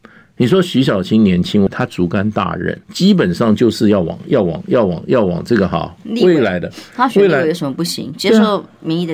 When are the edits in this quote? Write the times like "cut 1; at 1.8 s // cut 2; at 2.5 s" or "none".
cut 1; at 1.7 s // cut 2; at 2.8 s

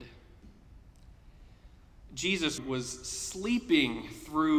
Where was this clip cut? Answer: cut 1; at 2.6 s

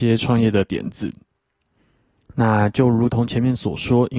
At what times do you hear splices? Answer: cut 1; at 2.3 s

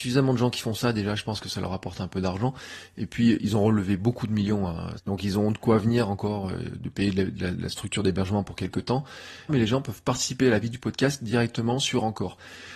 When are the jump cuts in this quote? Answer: cut 1; at 5.0 s // cut 2; at 9.5 s

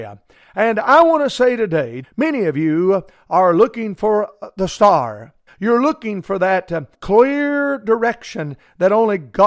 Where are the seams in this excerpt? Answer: cut 1; at 2.0 s // cut 2; at 5.5 s // cut 3; at 6.9 s

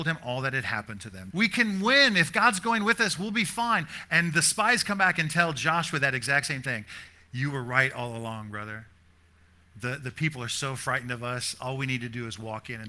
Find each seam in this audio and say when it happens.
cut 1; at 1.3 s

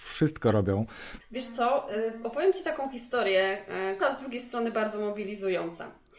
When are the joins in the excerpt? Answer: cut 1; at 1.2 s // cut 2; at 4.0 s

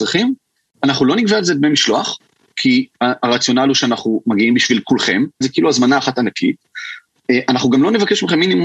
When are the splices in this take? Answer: cut 1; at 5.4 s

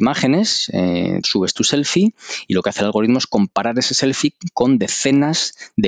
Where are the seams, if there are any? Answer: cut 1; at 1.2 s

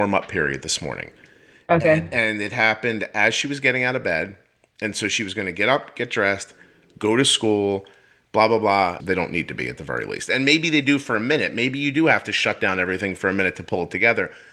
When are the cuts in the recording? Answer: cut 1; at 9.0 s

